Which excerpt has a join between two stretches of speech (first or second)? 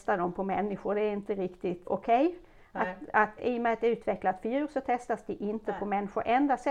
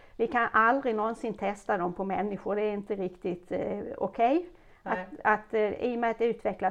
first